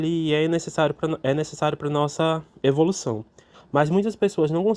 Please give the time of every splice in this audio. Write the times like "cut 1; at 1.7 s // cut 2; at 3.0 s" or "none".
cut 1; at 3.5 s